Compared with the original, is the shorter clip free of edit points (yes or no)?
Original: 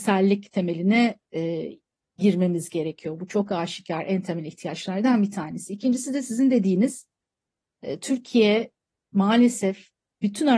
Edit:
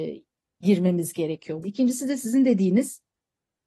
no